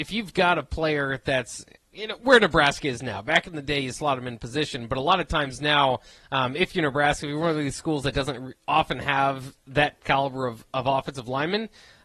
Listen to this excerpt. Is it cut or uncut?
uncut